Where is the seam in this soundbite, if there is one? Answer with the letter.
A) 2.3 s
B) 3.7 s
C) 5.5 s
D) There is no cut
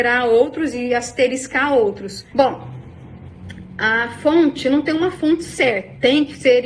A